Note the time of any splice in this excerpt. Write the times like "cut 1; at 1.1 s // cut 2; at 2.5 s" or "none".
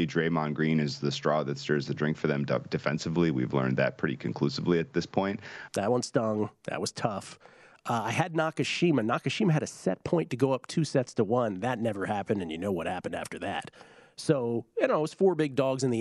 cut 1; at 5.7 s